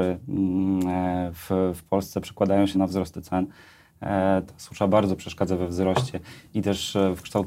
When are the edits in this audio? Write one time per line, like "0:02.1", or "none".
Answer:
0:02.7
0:04.5